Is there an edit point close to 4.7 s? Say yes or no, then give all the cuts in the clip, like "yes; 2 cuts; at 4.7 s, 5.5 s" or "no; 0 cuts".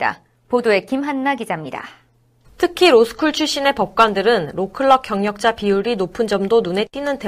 no; 1 cut; at 2.4 s